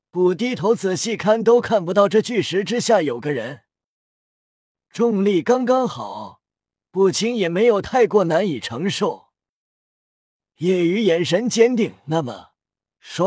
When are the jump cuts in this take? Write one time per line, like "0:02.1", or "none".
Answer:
none